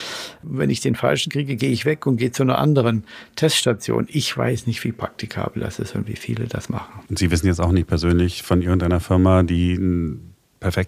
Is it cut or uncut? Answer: uncut